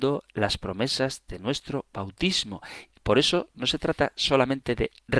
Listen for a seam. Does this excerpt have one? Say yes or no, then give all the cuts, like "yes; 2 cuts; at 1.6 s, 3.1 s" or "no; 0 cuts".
no; 0 cuts